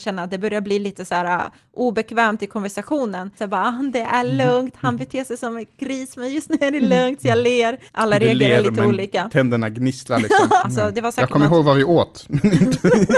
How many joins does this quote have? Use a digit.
3